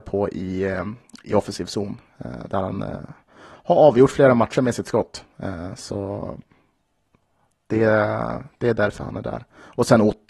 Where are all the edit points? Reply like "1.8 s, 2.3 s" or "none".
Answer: none